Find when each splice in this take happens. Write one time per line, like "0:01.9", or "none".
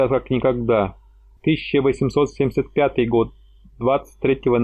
0:01.4